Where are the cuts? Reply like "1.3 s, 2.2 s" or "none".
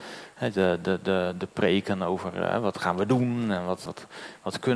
3.9 s